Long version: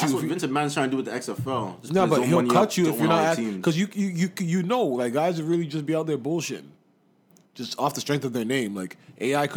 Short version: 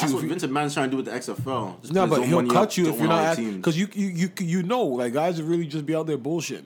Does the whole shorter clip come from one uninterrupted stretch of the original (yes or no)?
yes